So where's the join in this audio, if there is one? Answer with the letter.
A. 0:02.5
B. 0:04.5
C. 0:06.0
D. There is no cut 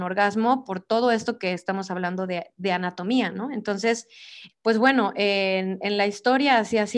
B